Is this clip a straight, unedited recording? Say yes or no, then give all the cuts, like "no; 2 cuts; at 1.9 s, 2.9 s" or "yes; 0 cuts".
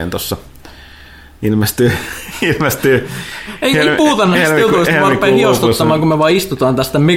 yes; 0 cuts